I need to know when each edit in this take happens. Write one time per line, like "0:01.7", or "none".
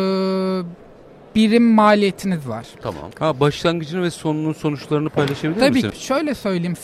0:03.1
0:05.9